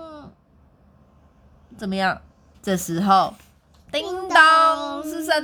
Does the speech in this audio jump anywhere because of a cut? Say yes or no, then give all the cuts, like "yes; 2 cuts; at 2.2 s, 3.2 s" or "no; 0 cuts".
yes; 1 cut; at 2.5 s